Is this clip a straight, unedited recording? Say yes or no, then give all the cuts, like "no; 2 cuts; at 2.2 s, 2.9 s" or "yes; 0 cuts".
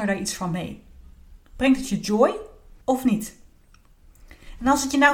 no; 2 cuts; at 1.4 s, 2.8 s